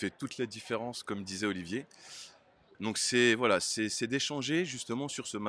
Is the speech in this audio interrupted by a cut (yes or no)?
yes